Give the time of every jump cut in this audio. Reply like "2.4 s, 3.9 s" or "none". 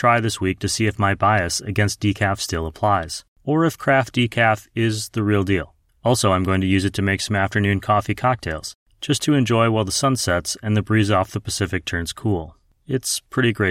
none